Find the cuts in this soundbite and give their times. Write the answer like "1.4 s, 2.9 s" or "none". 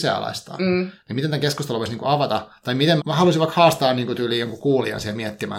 3.0 s